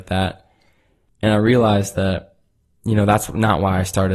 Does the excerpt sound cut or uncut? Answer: cut